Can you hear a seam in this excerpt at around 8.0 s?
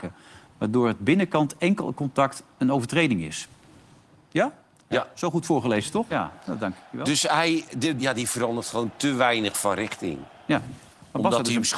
yes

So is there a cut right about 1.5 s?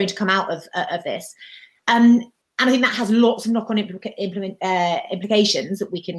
no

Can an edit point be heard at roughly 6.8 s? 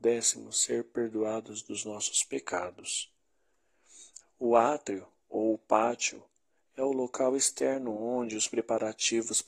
no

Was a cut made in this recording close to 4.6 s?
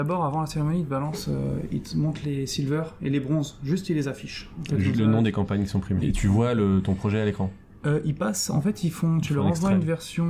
no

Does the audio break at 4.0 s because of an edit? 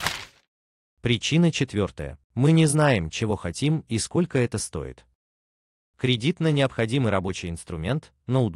no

